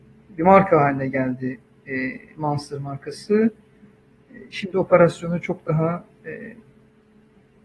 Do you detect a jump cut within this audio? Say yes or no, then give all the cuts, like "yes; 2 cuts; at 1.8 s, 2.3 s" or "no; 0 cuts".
no; 0 cuts